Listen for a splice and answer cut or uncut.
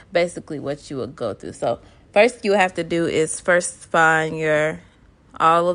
cut